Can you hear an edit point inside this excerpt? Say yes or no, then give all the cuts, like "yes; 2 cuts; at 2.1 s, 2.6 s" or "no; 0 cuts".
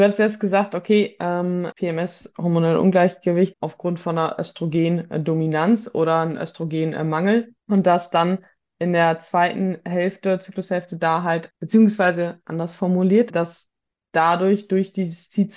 yes; 2 cuts; at 1.7 s, 11.5 s